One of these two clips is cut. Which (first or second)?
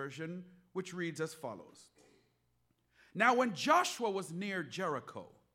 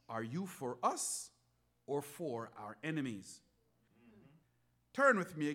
second